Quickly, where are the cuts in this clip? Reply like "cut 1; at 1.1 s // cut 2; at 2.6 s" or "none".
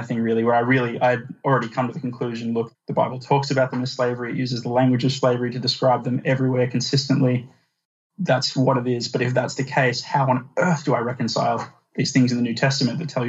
cut 1; at 2.7 s